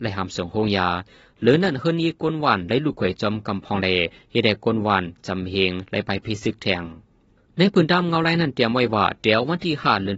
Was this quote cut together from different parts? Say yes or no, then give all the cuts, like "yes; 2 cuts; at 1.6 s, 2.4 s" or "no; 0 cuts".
no; 0 cuts